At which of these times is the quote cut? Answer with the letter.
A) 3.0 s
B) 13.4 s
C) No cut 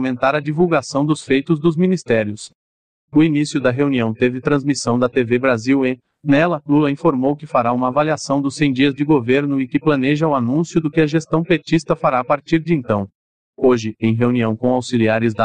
B